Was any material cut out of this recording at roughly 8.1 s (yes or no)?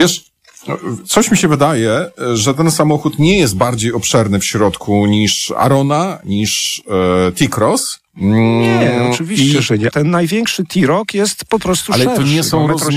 yes